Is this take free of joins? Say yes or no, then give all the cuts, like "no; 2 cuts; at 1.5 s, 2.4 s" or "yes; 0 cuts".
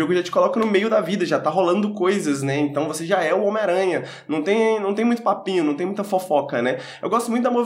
yes; 0 cuts